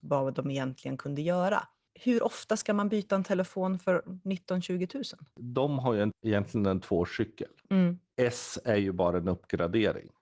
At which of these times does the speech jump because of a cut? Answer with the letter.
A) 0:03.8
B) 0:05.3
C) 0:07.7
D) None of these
C